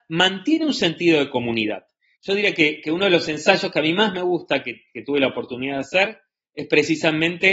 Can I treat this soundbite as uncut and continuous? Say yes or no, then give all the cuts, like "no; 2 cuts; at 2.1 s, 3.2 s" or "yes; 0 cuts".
no; 1 cut; at 2.2 s